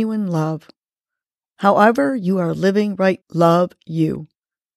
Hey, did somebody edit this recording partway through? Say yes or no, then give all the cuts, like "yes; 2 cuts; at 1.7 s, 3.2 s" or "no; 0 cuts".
yes; 2 cuts; at 1.5 s, 3.2 s